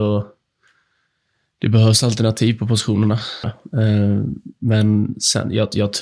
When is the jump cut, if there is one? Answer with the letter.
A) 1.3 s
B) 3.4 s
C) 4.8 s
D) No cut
B